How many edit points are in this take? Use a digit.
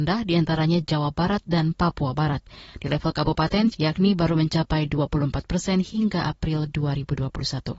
1